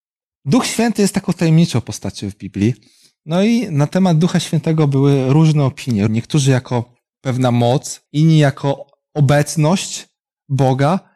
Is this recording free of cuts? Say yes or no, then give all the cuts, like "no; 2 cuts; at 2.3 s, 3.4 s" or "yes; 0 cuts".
no; 2 cuts; at 6.1 s, 8.1 s